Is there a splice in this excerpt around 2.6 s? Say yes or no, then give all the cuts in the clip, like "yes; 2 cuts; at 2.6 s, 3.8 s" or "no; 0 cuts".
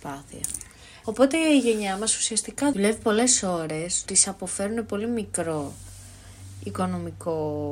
no; 2 cuts; at 1.0 s, 4.1 s